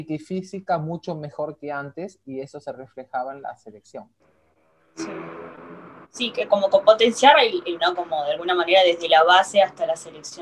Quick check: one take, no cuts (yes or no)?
no